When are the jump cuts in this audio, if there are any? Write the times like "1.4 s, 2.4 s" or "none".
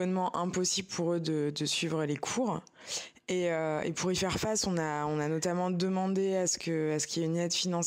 none